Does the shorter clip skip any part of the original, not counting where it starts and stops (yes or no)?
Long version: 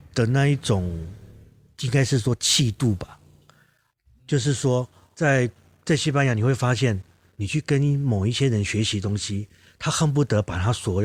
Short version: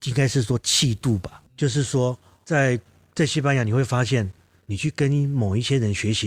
yes